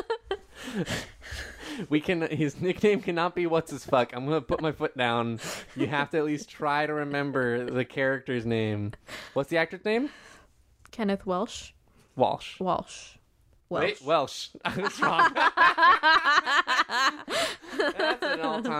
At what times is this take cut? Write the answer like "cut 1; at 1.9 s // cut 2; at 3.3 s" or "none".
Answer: none